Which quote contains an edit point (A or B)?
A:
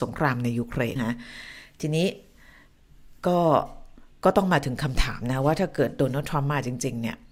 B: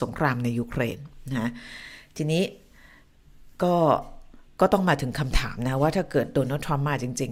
A